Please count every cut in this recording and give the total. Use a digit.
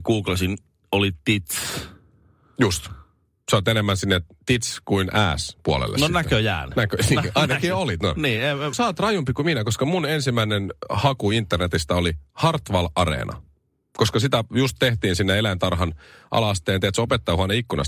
1